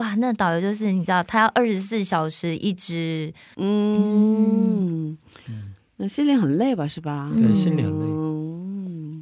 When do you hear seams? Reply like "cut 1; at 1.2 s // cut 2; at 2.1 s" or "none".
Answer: cut 1; at 3.5 s